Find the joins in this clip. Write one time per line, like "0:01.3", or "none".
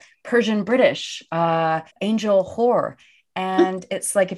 0:01.9